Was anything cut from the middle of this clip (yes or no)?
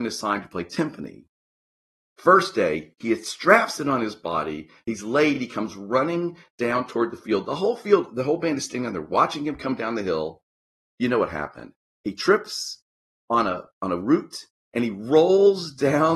no